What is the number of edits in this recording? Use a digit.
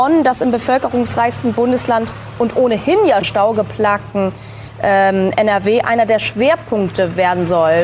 1